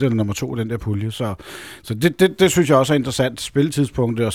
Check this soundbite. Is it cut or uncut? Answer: uncut